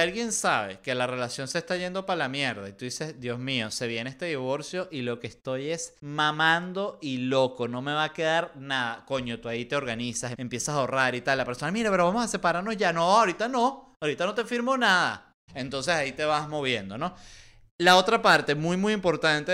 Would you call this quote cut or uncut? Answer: cut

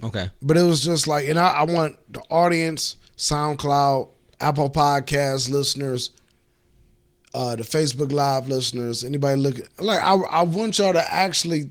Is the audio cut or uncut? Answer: cut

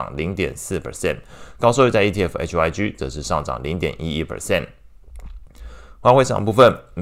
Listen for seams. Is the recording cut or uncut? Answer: uncut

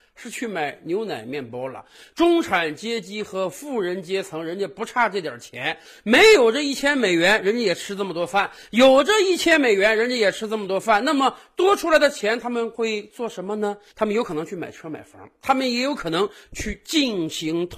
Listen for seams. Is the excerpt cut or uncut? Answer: uncut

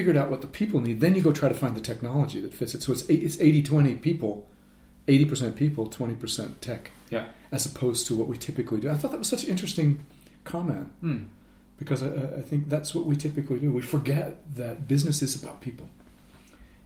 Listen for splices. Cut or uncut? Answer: uncut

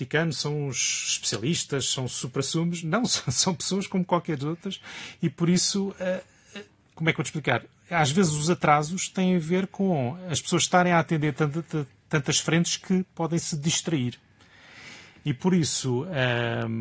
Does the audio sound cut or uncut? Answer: uncut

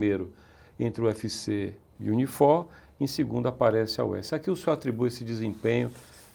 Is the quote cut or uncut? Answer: uncut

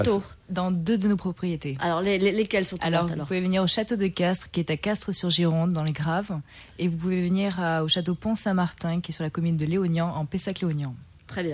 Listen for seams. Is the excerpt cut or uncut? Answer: uncut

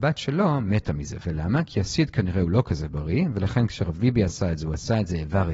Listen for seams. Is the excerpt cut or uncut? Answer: uncut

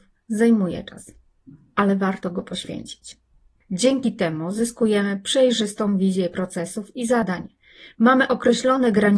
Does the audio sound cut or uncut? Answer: uncut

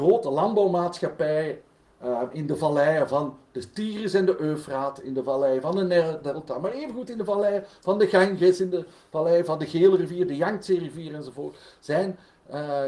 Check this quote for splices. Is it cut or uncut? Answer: uncut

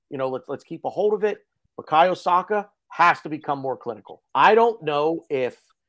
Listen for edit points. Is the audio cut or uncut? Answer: cut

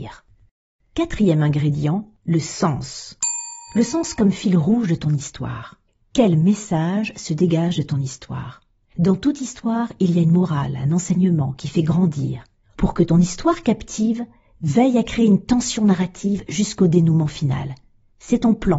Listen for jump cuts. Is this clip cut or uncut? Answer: cut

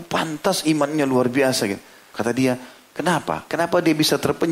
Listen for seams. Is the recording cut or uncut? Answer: cut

